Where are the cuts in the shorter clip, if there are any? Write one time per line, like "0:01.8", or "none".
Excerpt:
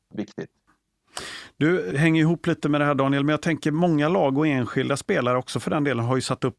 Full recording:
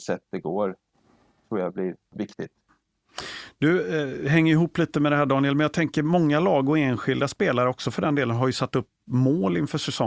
0:01.9